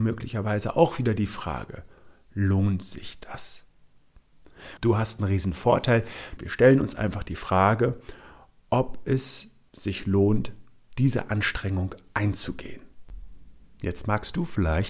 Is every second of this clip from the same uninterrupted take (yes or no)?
no